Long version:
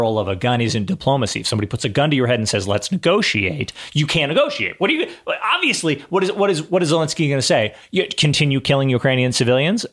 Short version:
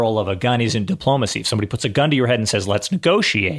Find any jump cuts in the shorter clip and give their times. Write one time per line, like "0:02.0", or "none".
none